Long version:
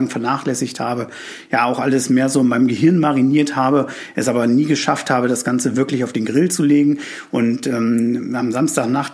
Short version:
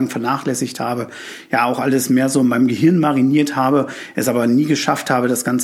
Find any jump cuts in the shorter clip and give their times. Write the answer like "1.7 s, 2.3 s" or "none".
none